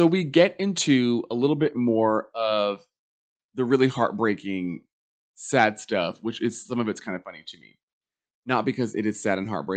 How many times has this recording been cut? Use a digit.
0